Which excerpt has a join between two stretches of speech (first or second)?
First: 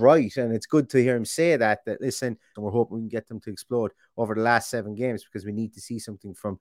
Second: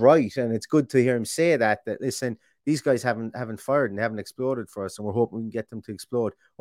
first